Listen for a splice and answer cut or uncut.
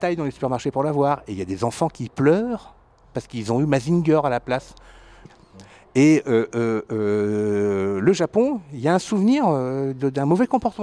cut